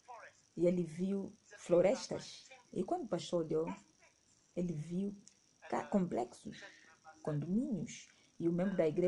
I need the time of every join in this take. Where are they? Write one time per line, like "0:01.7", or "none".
0:02.7

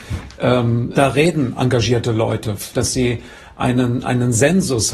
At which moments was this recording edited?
0:00.9
0:02.7

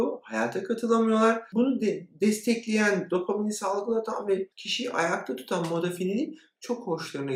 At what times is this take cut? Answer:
0:04.5

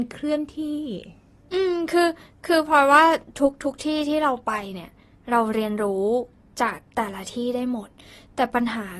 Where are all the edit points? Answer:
0:06.9

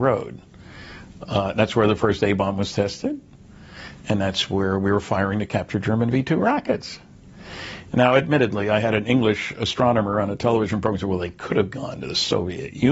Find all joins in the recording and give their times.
none

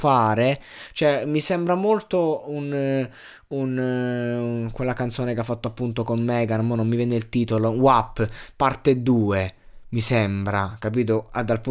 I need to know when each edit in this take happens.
none

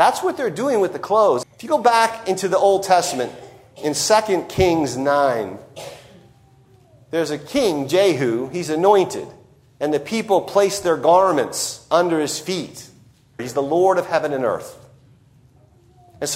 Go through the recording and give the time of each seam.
0:01.4
0:13.4

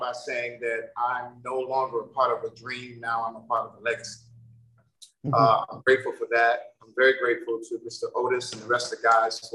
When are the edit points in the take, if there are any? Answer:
0:05.3

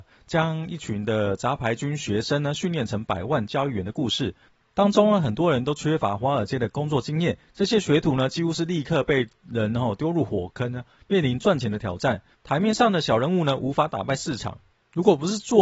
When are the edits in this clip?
0:12.3

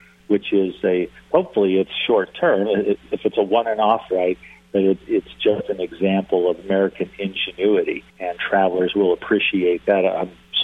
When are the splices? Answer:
0:04.1
0:08.1

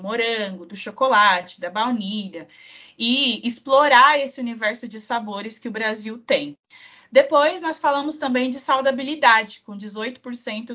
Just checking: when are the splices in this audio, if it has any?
none

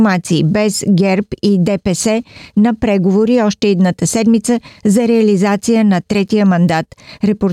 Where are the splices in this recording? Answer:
none

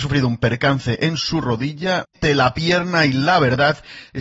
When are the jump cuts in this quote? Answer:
0:02.0

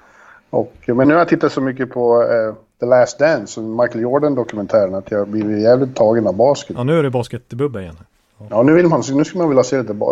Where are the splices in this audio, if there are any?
0:01.0

